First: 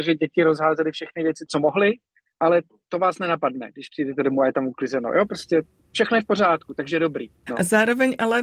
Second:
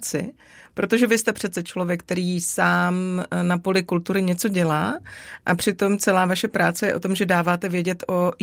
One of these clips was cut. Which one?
first; 1 cut; at 7.5 s

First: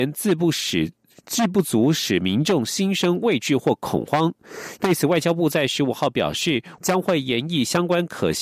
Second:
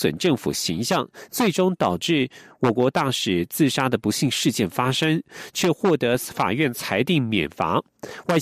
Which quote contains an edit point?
first; 2 cuts; at 4.8 s, 6.8 s

